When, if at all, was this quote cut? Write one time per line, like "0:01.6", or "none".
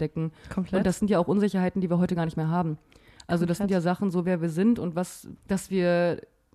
0:04.2
0:05.4